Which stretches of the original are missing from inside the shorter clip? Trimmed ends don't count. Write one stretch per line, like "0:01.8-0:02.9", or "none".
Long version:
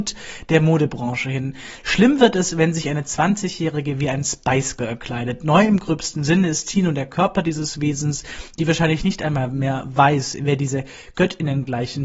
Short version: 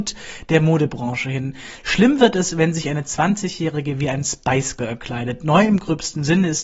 none